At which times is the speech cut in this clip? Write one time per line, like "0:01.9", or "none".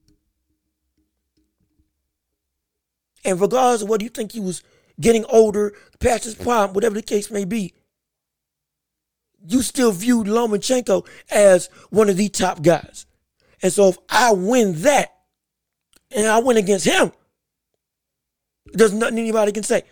none